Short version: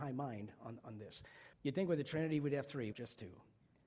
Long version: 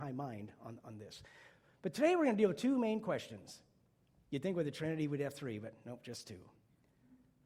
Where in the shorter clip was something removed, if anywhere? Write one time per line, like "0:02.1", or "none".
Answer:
0:01.5
0:02.9